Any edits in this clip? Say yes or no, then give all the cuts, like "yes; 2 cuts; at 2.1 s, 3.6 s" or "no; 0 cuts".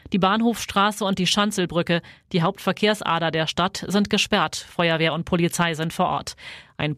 no; 0 cuts